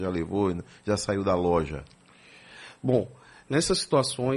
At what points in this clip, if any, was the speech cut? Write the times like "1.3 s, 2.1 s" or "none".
none